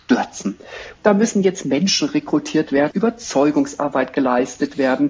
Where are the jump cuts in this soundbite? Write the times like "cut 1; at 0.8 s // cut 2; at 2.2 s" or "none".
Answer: cut 1; at 1.0 s // cut 2; at 2.9 s